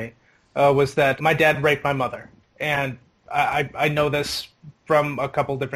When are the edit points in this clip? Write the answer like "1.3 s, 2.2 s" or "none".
1.2 s